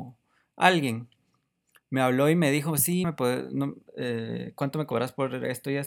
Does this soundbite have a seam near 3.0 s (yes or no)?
yes